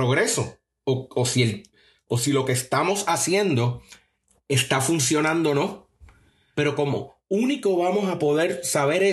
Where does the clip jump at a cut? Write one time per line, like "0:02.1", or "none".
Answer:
0:06.5